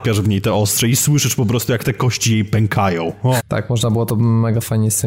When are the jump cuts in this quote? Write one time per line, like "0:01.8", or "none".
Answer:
0:03.4